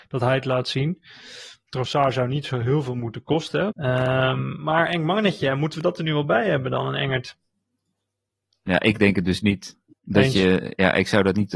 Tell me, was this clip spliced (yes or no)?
yes